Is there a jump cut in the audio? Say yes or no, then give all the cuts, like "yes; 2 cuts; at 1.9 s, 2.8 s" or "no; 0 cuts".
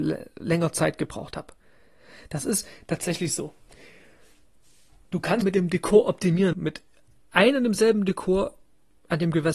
yes; 2 cuts; at 5.4 s, 6.5 s